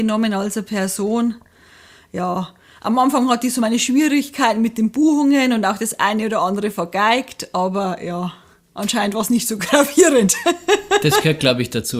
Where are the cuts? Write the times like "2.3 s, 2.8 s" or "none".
none